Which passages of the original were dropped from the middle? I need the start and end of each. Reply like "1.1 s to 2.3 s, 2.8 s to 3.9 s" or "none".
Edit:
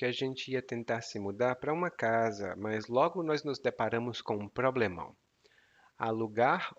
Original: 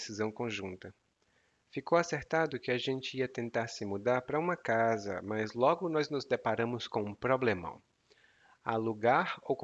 none